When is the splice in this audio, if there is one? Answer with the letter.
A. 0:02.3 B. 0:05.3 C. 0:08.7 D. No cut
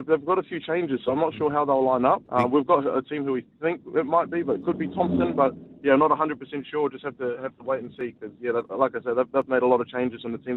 A